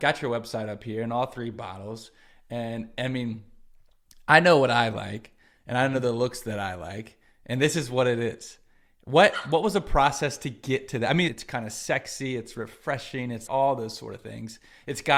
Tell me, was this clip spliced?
yes; 2 cuts; at 11.3 s, 13.5 s

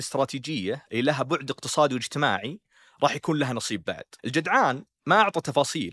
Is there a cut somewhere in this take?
yes; 1 cut; at 4.2 s

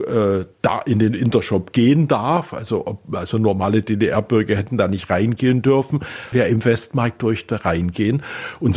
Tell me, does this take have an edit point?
yes; 1 cut; at 6.3 s

